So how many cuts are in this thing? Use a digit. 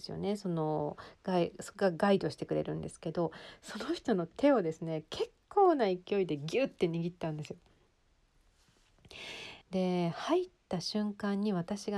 1